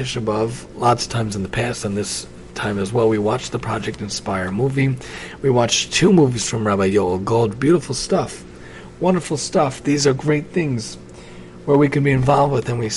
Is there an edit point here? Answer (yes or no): no